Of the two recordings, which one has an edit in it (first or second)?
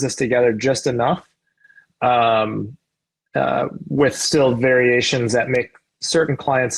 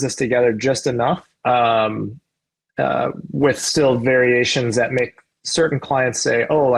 second